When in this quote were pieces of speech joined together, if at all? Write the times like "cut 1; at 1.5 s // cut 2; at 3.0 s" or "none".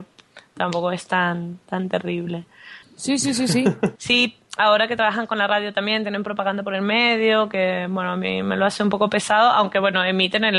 cut 1; at 2.8 s // cut 2; at 3.9 s